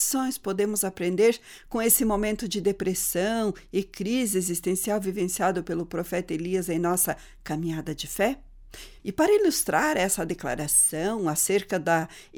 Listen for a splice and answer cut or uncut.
cut